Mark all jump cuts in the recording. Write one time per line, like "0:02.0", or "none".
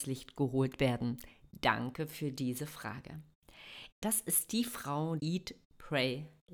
0:03.9
0:05.2